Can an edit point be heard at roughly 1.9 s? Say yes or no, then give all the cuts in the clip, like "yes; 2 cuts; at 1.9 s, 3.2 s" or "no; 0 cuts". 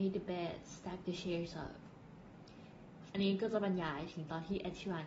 no; 1 cut; at 3.1 s